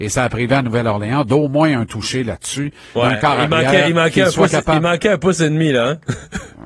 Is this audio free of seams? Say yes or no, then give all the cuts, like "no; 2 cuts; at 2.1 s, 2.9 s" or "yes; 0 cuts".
no; 1 cut; at 2.9 s